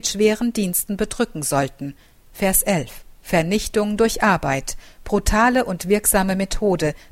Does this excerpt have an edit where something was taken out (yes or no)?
yes